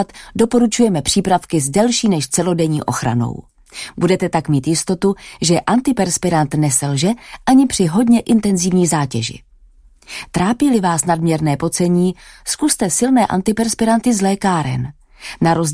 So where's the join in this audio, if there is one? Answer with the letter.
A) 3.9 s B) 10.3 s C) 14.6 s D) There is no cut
D